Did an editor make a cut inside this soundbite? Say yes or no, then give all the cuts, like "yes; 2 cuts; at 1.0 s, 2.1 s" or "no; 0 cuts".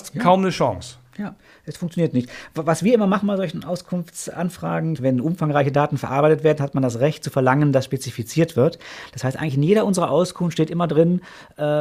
yes; 1 cut; at 5.0 s